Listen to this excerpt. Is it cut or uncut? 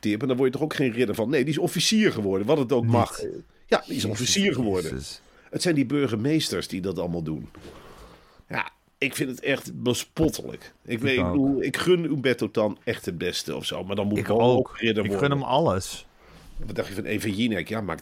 uncut